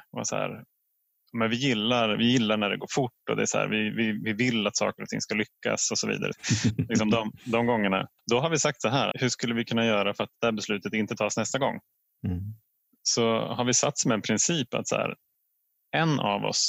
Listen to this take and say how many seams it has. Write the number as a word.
two